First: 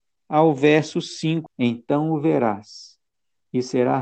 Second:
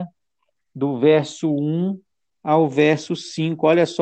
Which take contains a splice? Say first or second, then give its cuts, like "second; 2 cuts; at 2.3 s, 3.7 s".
first; 1 cut; at 1.5 s